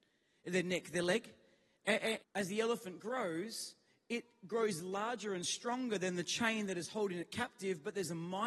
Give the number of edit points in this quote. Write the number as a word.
one